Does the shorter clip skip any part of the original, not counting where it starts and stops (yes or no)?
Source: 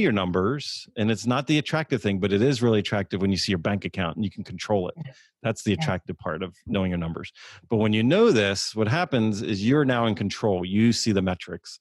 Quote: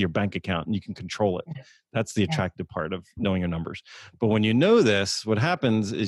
no